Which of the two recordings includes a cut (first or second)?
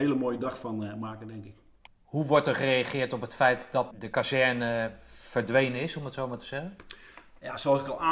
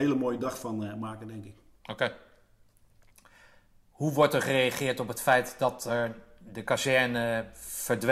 first